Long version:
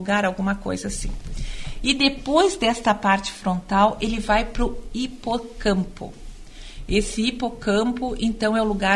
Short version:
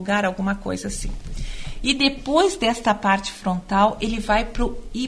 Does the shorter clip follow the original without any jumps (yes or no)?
yes